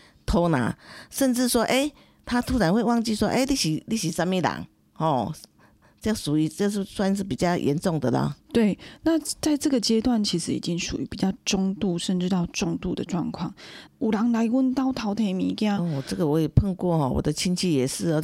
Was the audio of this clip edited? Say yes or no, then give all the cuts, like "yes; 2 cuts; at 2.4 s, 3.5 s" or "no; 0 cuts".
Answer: yes; 1 cut; at 13.9 s